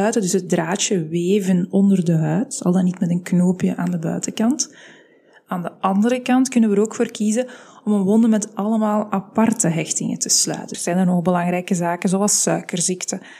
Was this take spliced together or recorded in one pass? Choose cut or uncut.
cut